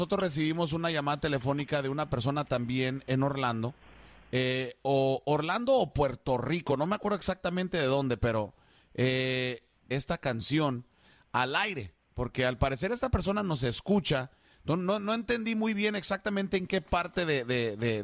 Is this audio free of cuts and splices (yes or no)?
no